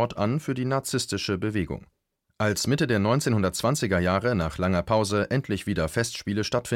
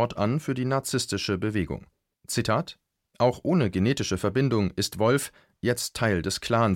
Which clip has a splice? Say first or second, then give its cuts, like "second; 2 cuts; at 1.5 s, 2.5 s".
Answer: second; 2 cuts; at 2.1 s, 5.5 s